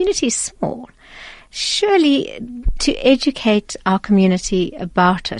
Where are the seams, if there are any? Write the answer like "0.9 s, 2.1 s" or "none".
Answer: none